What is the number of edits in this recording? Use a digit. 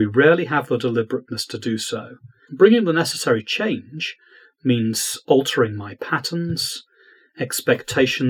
1